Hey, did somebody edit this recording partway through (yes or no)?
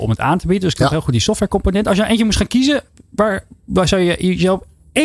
no